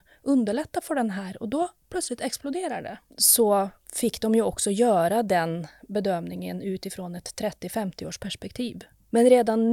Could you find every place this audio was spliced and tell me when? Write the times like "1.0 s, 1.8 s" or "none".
3.1 s